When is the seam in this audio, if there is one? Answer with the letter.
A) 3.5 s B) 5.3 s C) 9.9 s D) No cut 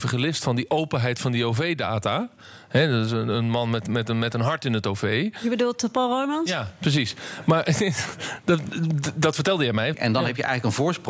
C